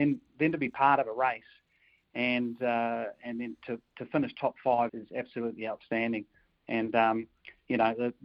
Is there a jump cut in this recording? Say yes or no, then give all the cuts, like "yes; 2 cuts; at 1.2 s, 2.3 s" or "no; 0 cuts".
yes; 1 cut; at 4.9 s